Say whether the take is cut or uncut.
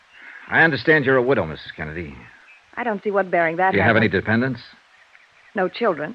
uncut